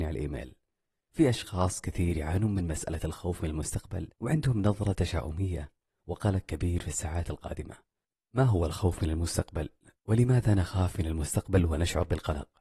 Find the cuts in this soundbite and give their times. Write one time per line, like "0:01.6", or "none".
0:04.1